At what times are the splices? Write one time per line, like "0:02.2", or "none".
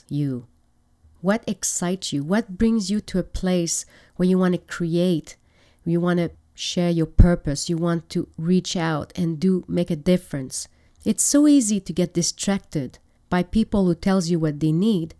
0:10.9